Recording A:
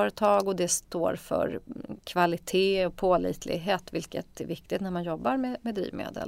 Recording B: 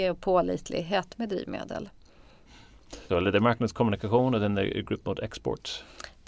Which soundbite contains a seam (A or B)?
B